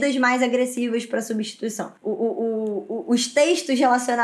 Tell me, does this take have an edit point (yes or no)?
yes